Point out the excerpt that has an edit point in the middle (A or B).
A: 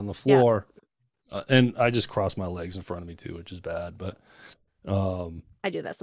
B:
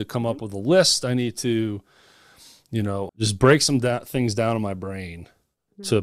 B